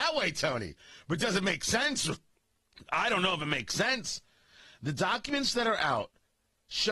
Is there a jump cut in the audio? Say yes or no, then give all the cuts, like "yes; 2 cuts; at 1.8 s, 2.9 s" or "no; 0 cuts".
no; 0 cuts